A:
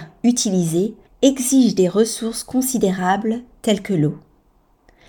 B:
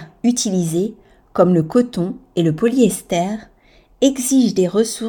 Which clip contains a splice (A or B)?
A